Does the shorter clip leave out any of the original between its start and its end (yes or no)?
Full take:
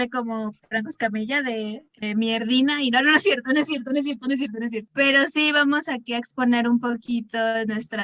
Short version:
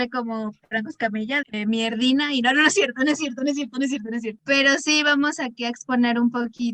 yes